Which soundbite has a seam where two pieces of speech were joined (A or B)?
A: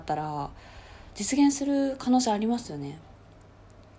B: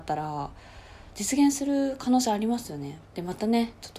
B